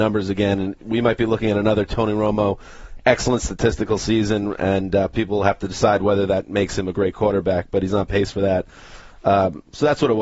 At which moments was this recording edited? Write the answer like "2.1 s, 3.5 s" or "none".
none